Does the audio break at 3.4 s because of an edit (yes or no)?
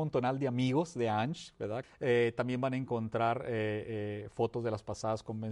no